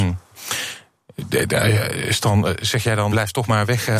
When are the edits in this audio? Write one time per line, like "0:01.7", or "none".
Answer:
0:03.1